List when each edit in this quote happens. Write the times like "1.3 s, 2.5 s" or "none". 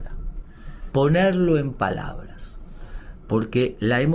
0.9 s